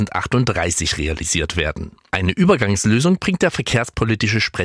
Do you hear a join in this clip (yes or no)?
no